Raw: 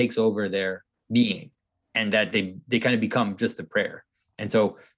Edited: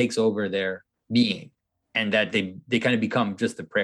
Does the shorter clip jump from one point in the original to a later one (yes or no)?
no